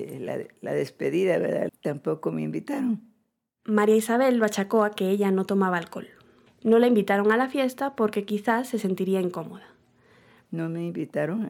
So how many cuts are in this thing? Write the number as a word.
three